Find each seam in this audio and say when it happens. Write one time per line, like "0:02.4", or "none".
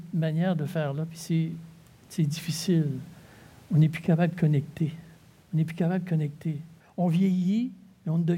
0:05.4
0:06.8